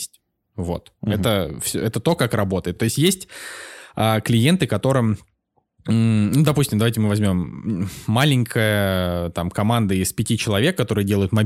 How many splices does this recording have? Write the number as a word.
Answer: zero